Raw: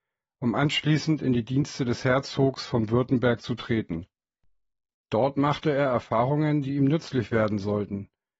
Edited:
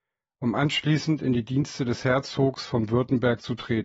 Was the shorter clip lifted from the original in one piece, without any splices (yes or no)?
yes